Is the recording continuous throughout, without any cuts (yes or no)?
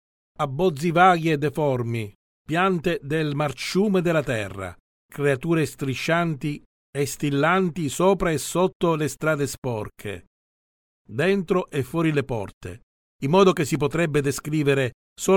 no